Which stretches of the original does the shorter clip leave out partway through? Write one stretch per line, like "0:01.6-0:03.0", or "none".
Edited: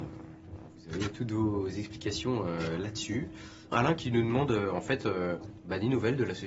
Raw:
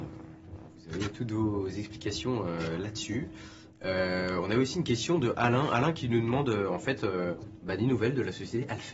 0:03.7-0:05.7